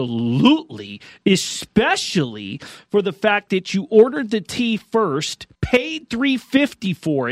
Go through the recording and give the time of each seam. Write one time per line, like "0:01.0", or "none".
0:05.5